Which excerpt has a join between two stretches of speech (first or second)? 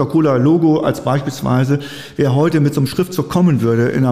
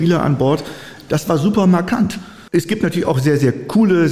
second